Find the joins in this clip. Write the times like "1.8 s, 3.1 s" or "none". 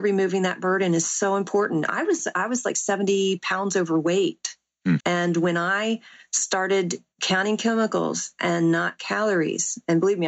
5.0 s, 7.1 s